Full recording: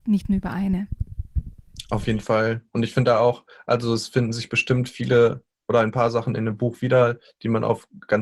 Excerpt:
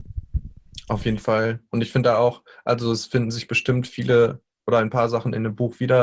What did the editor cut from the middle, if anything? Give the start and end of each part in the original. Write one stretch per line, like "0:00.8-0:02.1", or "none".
none